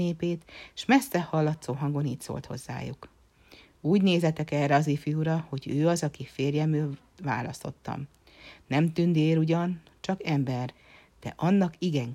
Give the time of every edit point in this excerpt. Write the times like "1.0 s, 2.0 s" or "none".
none